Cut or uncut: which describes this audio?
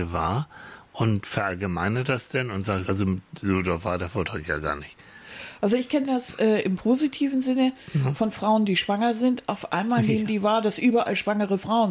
cut